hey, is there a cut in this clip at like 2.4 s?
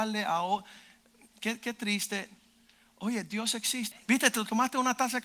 no; 1 cut; at 3.9 s

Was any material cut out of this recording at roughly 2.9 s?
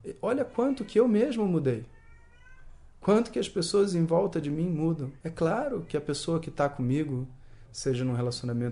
no; 2 cuts; at 5.2 s, 7.7 s

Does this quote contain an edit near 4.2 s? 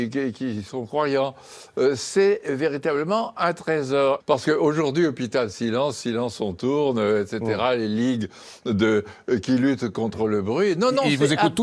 yes; 1 cut; at 4.2 s

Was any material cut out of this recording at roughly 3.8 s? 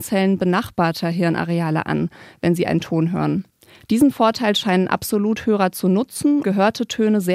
no; 1 cut; at 6.4 s

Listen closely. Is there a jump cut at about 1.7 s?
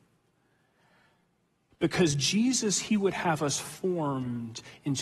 yes; 1 cut; at 1.7 s

